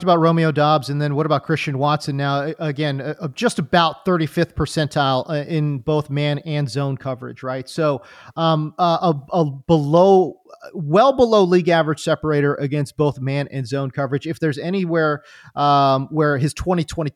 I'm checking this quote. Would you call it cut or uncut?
uncut